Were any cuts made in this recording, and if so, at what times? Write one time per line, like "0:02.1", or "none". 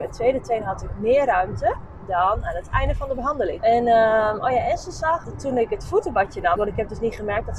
0:03.6
0:05.2
0:06.6